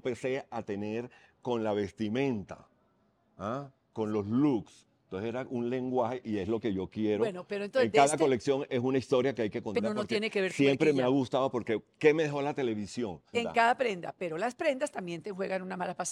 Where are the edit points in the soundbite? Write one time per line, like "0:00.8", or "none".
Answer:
0:09.8
0:13.3